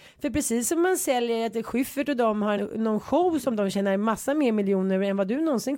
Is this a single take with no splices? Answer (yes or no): no